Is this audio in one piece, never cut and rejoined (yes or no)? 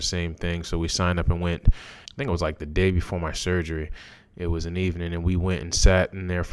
no